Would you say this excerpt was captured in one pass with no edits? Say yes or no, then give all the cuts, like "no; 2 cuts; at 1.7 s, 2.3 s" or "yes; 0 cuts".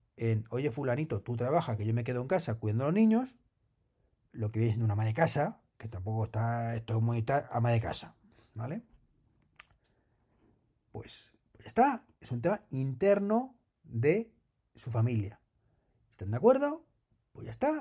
yes; 0 cuts